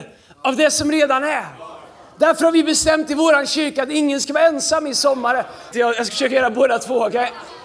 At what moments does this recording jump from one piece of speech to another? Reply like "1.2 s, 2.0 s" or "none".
5.7 s